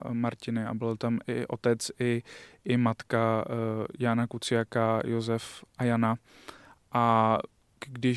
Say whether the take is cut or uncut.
uncut